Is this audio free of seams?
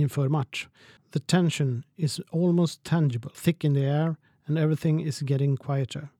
no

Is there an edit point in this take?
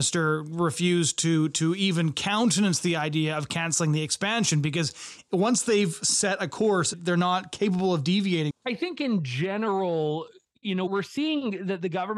yes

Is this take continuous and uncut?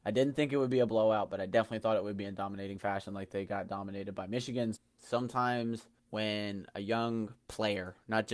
no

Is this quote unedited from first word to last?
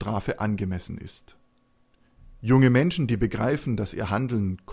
yes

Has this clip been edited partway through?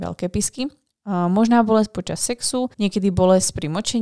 yes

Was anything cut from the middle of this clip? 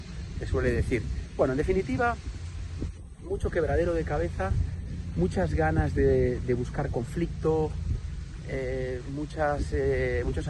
no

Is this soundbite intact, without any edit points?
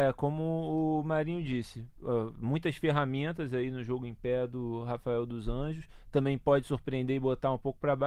yes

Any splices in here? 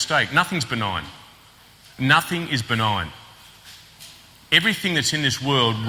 no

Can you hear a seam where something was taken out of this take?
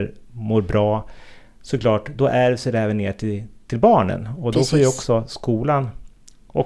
no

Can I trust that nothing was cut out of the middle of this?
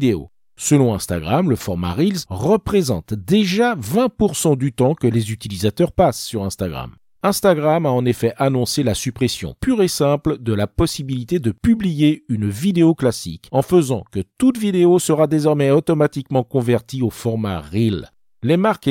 no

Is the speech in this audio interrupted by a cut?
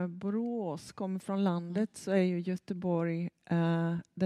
no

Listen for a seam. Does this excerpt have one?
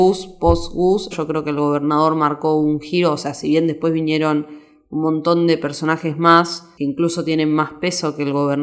yes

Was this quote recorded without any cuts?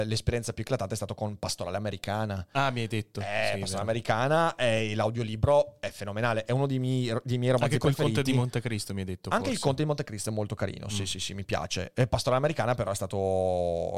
yes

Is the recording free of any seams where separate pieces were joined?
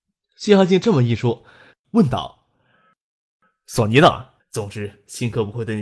no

